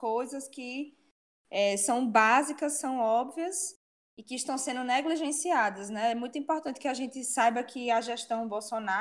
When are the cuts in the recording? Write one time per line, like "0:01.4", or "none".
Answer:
none